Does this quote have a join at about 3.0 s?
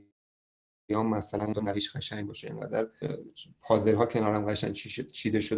yes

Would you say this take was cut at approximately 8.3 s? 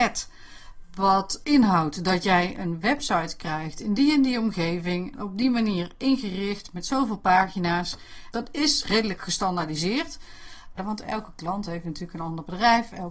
yes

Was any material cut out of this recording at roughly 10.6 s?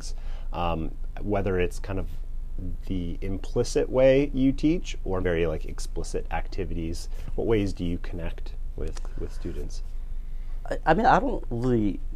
no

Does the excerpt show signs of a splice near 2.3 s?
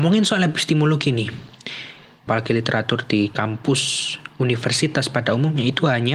yes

